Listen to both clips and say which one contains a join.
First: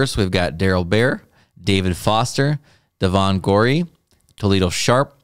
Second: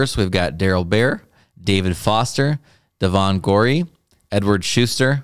first; 1 cut; at 4.3 s

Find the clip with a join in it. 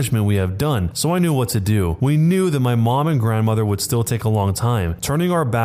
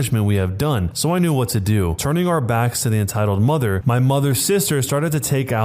second; 1 cut; at 2.0 s

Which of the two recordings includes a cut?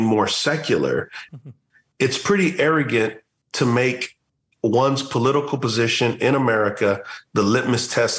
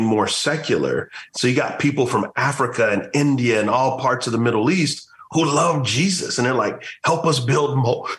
first; 1 cut; at 1.3 s

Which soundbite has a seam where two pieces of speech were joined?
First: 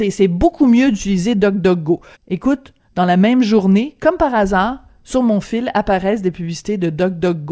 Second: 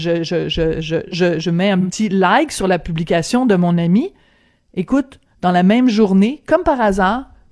first; 1 cut; at 2.1 s

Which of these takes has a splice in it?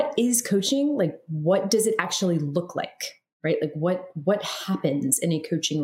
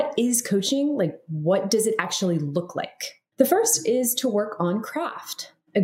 second; 1 cut; at 3.3 s

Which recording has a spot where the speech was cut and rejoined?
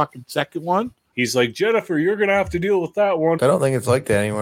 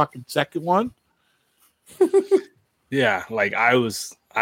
first; 2 cuts; at 1.1 s, 3.4 s

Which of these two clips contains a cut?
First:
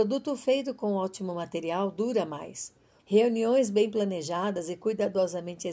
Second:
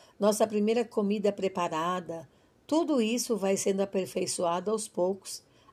first; 1 cut; at 3.0 s

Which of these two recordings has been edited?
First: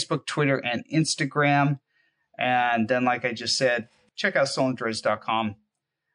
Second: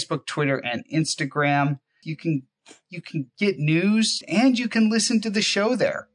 second; 2 cuts; at 2.0 s, 4.2 s

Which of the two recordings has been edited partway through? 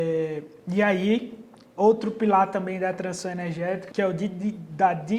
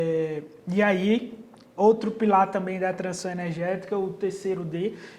first; 1 cut; at 3.9 s

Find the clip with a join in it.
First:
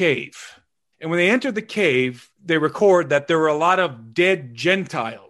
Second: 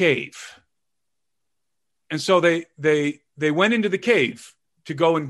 first; 2 cuts; at 0.9 s, 2.3 s

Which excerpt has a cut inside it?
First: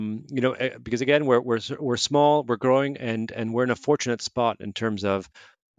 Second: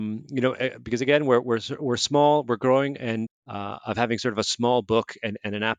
second; 1 cut; at 3.3 s

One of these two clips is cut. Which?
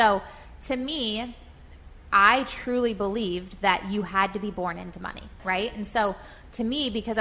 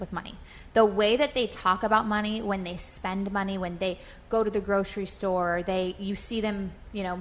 first; 1 cut; at 5.4 s

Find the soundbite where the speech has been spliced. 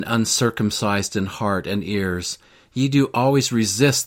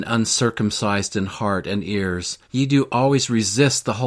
second; 1 cut; at 2.4 s

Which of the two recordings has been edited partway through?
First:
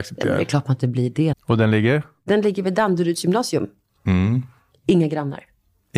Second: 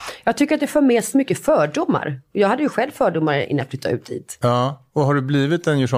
first; 2 cuts; at 1.3 s, 3.9 s

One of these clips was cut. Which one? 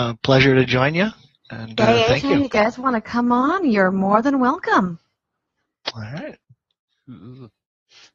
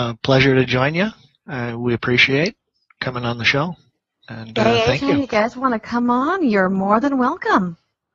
first; 2 cuts; at 1.4 s, 6.4 s

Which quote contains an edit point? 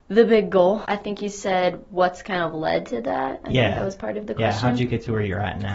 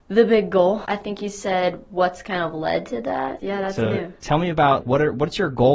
second; 2 cuts; at 3.4 s, 4.8 s

